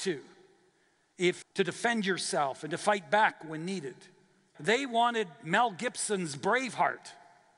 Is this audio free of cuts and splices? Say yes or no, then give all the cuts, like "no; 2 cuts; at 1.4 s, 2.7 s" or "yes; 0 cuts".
no; 2 cuts; at 1.4 s, 4.5 s